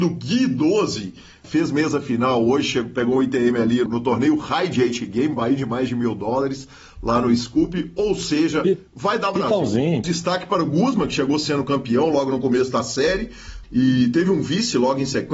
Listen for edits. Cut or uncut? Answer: cut